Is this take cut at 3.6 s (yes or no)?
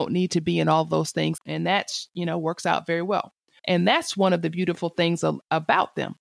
yes